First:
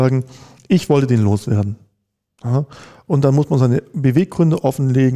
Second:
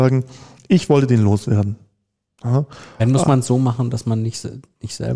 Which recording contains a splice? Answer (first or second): second